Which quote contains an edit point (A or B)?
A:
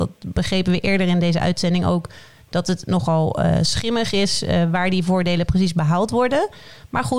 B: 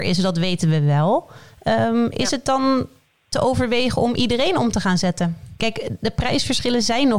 B